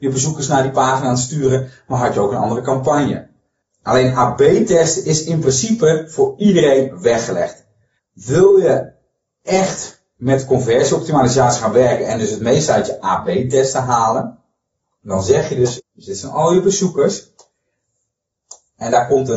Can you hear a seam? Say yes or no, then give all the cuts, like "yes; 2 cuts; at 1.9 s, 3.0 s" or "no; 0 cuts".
yes; 3 cuts; at 3.7 s, 8.0 s, 15.8 s